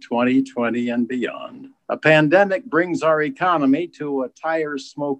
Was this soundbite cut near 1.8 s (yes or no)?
yes